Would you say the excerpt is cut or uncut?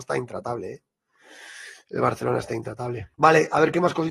cut